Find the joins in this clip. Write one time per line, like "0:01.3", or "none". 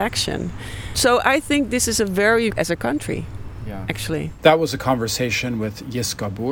0:02.5